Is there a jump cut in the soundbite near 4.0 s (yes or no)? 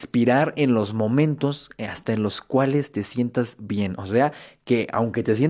no